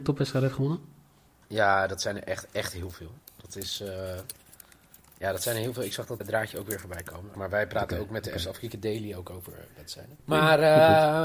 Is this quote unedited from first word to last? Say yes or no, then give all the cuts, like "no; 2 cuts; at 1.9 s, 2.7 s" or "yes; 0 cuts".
no; 3 cuts; at 6.2 s, 7.3 s, 10.2 s